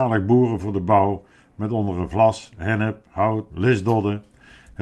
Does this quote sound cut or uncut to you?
cut